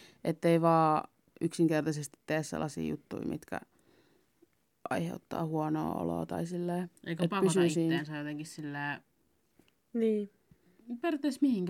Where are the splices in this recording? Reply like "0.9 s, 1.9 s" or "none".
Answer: none